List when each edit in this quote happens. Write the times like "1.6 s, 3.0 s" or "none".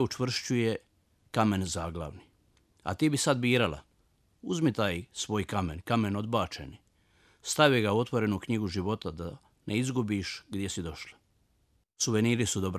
none